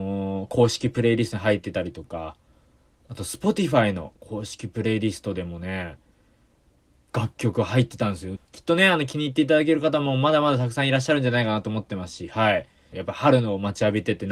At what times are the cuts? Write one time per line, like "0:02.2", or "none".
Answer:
0:08.4
0:12.9